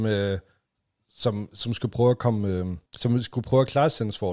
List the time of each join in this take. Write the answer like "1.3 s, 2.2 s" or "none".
2.9 s